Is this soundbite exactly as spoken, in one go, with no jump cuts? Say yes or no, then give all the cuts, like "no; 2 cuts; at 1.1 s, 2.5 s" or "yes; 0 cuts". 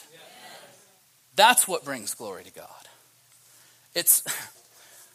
yes; 0 cuts